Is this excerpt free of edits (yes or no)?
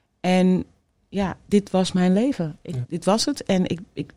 no